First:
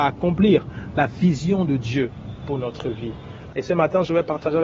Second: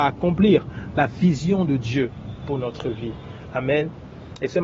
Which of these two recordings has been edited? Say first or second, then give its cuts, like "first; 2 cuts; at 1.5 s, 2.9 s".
first; 1 cut; at 3.5 s